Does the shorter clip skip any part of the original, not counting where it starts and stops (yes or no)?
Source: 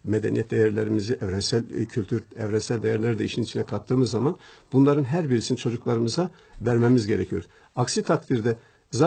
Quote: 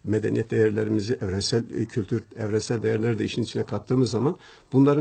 no